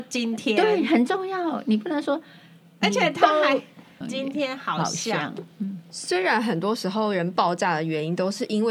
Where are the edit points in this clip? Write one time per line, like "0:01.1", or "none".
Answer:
0:04.0